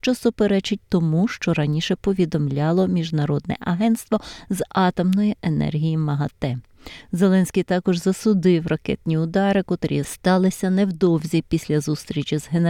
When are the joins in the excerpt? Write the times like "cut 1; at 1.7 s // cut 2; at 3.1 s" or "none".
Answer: none